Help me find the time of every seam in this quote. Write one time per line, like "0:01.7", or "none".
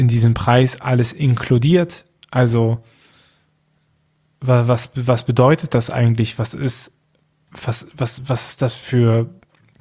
none